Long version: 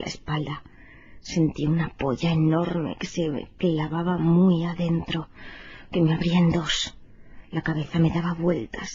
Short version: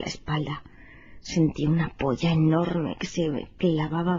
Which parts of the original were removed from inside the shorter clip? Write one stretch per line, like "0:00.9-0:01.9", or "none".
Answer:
none